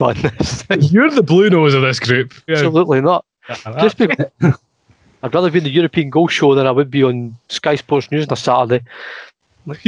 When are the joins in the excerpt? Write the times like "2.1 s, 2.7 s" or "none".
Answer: 2.5 s, 4.1 s